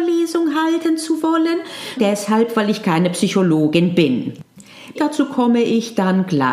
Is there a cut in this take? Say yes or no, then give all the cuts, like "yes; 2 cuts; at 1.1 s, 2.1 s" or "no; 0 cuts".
yes; 2 cuts; at 2.0 s, 5.0 s